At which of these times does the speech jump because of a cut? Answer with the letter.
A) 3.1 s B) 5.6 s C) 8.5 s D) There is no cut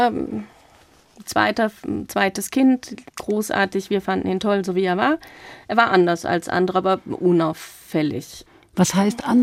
A